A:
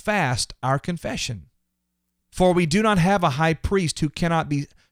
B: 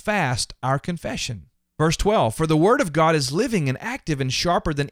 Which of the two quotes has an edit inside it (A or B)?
B